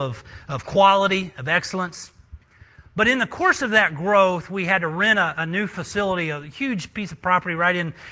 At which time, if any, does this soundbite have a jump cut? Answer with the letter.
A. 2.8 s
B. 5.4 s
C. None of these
C